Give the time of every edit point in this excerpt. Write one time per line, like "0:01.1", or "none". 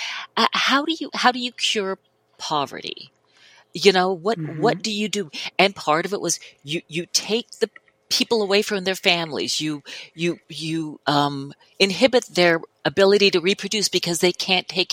0:10.4